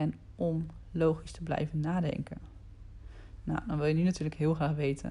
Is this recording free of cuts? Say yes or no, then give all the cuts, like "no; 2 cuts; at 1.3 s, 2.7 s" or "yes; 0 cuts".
yes; 0 cuts